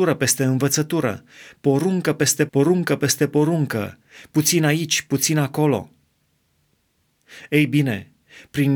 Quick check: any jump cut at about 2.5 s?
yes; 1 cut; at 2.5 s

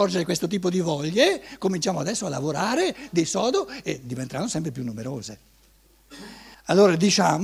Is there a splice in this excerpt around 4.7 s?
no; 1 cut; at 6.5 s

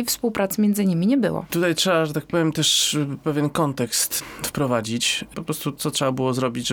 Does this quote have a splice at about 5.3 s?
yes; 1 cut; at 5.3 s

